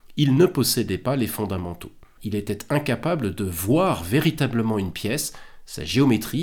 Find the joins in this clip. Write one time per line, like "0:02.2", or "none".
0:02.2